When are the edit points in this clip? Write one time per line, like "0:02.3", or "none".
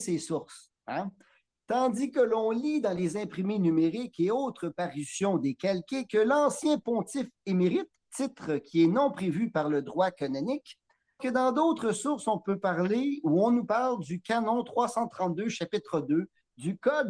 0:11.2